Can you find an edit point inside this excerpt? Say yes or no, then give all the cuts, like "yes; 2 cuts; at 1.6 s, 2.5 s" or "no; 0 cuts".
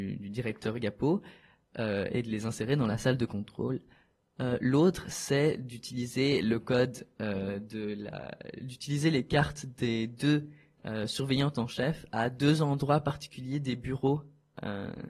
no; 0 cuts